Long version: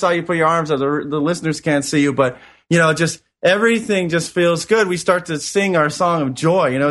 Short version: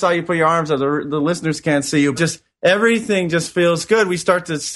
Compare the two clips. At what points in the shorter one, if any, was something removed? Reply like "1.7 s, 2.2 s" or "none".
2.2 s